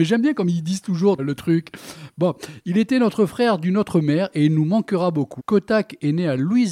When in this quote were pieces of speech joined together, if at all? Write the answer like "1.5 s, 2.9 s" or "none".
1.2 s, 5.4 s